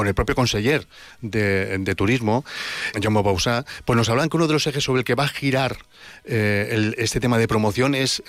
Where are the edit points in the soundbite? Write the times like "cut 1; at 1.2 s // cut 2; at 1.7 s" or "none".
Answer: cut 1; at 2.9 s